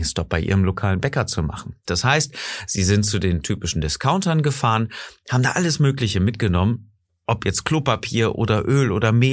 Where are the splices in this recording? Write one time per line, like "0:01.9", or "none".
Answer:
0:01.9